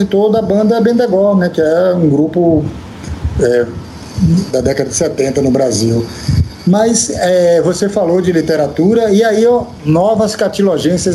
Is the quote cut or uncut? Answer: cut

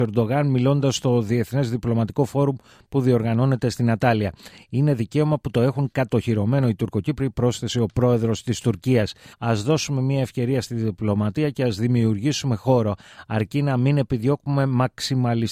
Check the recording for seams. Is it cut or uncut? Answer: cut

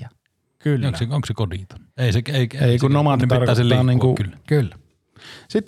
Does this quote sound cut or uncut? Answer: cut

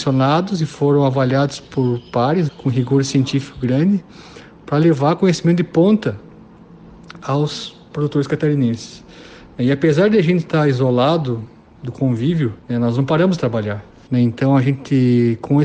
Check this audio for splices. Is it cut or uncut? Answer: cut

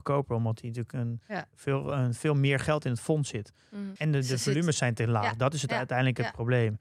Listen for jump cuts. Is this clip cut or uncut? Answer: cut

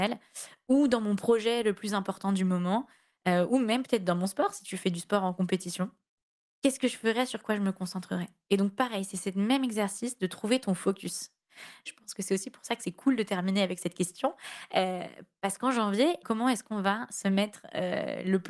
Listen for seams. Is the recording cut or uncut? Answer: cut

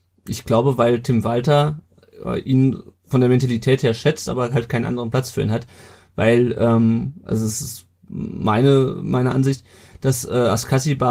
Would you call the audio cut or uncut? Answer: uncut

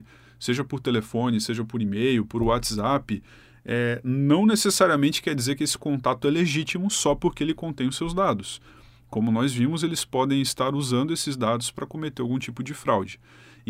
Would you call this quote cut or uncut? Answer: uncut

